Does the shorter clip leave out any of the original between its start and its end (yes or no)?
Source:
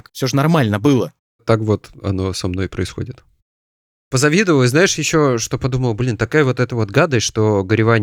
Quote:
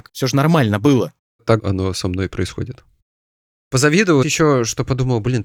yes